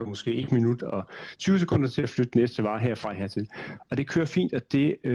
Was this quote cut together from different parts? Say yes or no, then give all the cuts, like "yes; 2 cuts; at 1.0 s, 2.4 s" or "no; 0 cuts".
no; 0 cuts